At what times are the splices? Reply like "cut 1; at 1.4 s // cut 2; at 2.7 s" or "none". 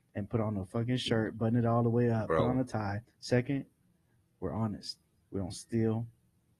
cut 1; at 3.0 s